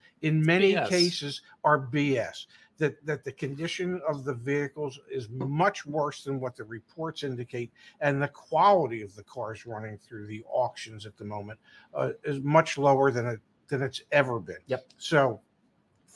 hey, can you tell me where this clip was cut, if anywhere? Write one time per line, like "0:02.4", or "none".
none